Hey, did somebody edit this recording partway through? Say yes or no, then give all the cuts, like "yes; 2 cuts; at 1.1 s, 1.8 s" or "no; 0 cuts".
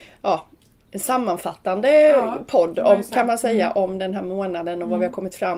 no; 0 cuts